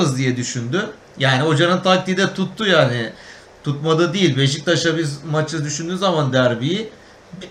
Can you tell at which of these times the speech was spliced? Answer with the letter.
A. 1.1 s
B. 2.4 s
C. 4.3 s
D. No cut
A